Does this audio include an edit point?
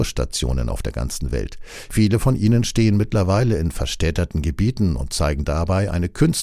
no; 0 cuts

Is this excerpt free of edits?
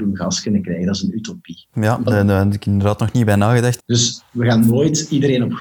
no; 2 cuts; at 1.7 s, 3.8 s

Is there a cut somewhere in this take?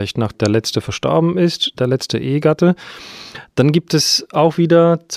yes; 1 cut; at 1.7 s

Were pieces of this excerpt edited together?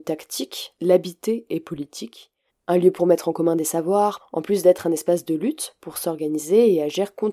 yes; 2 cuts; at 2.5 s, 4.2 s

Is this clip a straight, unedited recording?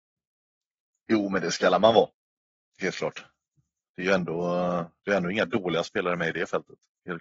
yes; 0 cuts

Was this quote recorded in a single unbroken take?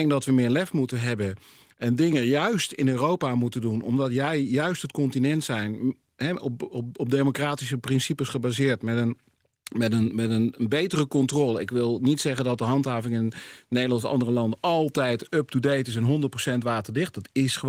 yes; 0 cuts

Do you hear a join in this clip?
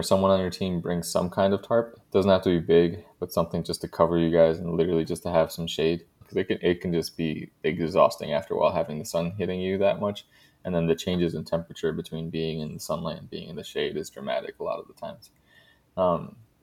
yes; 1 cut; at 6.2 s

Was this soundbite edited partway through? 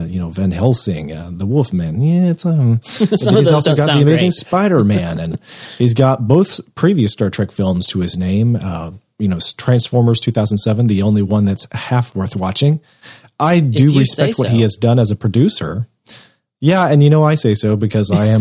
no; 0 cuts

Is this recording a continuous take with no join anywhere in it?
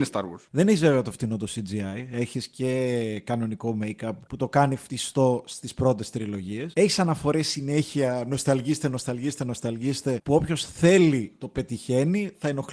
yes; 0 cuts

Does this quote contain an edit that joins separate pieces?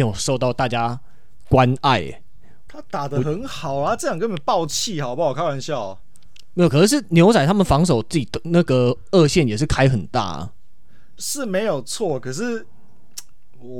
yes; 1 cut; at 11.2 s

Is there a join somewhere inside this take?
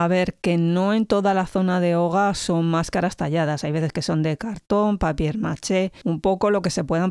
no; 0 cuts

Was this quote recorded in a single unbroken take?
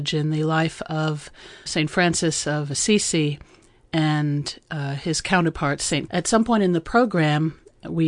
no; 2 cuts; at 1.7 s, 6.1 s

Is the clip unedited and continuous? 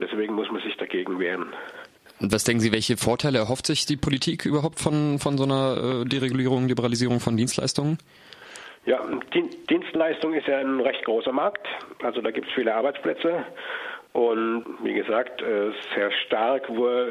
yes; 0 cuts

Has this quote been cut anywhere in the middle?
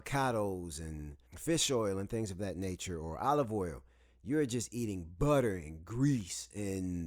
yes; 1 cut; at 1.3 s

